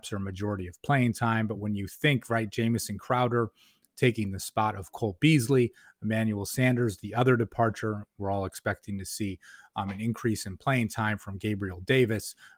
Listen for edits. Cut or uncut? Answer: uncut